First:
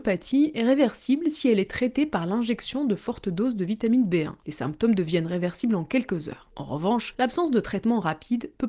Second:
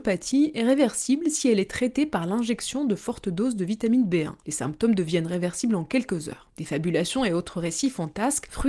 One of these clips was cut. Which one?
second; 1 cut; at 6.5 s

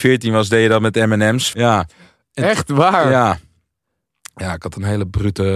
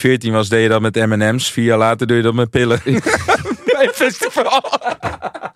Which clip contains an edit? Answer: first; 1 cut; at 1.5 s

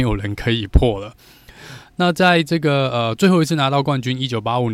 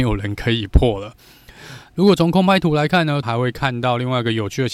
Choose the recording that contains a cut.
second; 2 cuts; at 1.9 s, 3.2 s

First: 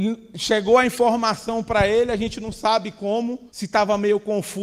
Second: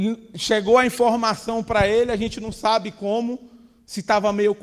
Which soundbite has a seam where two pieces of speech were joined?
first; 1 cut; at 3.5 s

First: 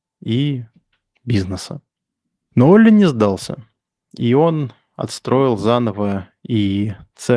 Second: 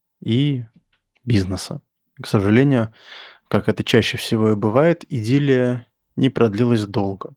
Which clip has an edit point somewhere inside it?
second; 1 cut; at 2.0 s

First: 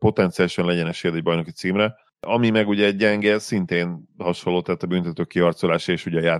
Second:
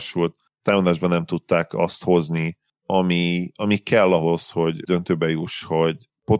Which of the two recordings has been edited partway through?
first; 1 cut; at 2.1 s

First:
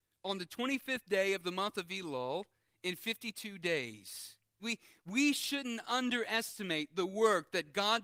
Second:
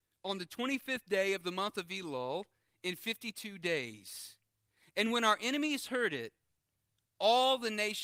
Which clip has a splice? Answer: first; 1 cut; at 4.6 s

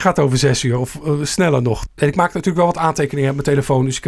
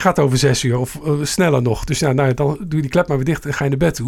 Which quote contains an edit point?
first; 1 cut; at 1.9 s

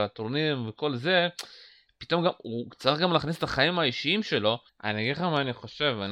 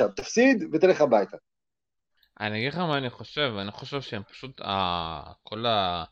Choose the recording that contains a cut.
first; 1 cut; at 4.7 s

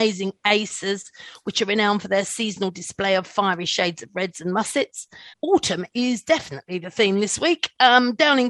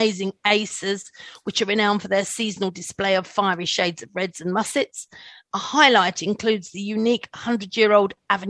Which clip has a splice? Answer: first; 1 cut; at 5.3 s

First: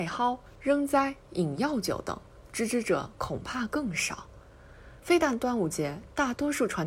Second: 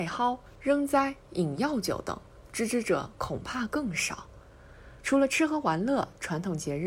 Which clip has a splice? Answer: second; 1 cut; at 5.0 s

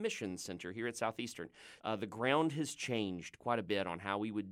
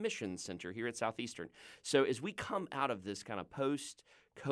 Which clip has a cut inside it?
first; 1 cut; at 1.8 s

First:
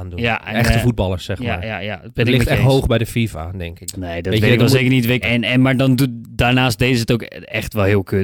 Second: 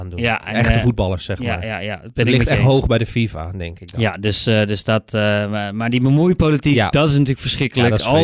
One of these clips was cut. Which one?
first; 2 cuts; at 3.9 s, 5.2 s

